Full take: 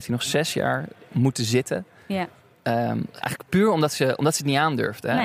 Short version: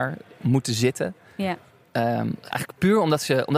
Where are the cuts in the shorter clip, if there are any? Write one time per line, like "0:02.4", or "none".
none